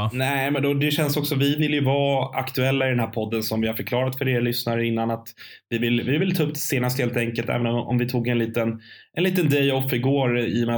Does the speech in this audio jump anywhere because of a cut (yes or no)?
no